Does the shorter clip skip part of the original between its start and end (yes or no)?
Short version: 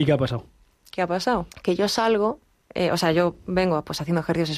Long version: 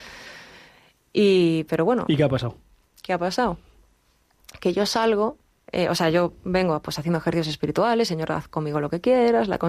yes